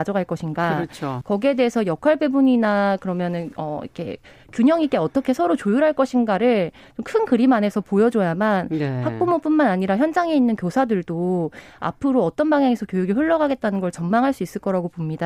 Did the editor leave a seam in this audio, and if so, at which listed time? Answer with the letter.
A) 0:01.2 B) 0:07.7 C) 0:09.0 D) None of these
A